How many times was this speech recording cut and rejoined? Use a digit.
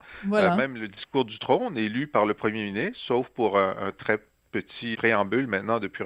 1